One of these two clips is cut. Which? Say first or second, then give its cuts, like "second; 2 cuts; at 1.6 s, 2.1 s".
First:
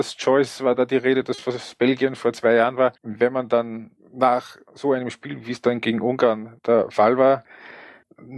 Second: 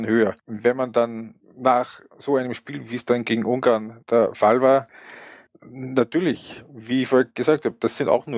first; 1 cut; at 3.0 s